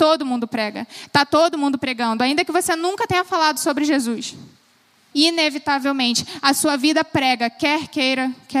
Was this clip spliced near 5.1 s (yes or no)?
yes